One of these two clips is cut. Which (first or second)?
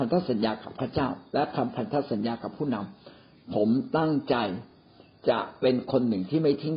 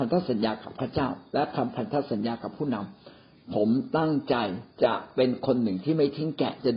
second